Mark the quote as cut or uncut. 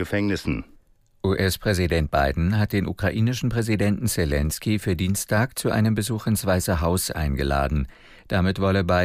uncut